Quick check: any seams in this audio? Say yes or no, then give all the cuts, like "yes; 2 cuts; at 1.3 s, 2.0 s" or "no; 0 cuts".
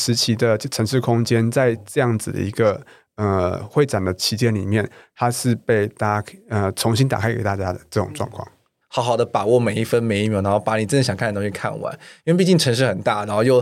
yes; 1 cut; at 8.8 s